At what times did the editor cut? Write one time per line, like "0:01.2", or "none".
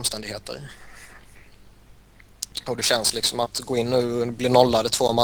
none